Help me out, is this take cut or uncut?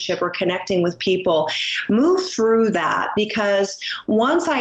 uncut